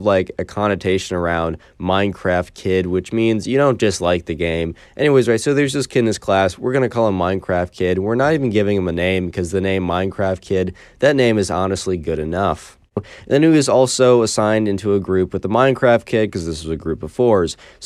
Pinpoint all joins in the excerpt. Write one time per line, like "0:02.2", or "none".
0:04.9
0:13.0

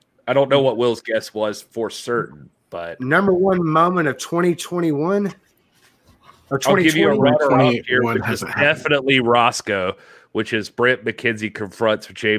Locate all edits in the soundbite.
none

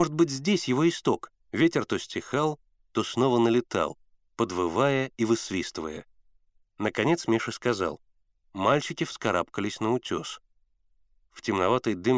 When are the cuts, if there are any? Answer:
0:01.5
0:08.5

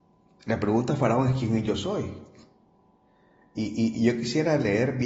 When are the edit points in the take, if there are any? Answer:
0:03.9

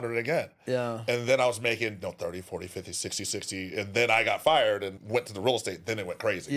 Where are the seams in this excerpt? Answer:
0:03.2
0:05.0

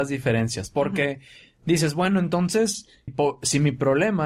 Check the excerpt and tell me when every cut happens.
0:03.1

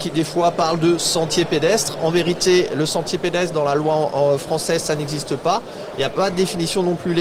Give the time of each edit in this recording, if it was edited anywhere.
none

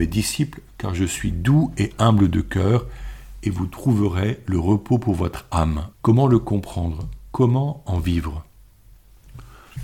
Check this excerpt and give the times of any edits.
0:05.9

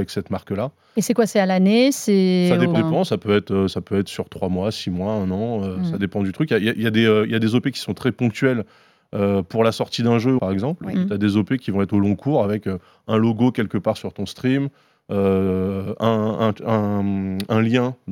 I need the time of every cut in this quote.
0:02.7
0:10.4

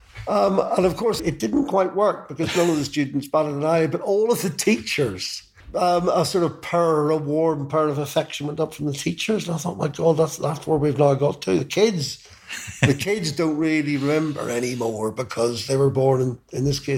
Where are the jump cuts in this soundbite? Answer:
0:01.2

